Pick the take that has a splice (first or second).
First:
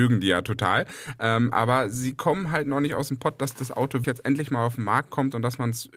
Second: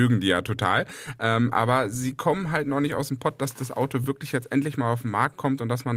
first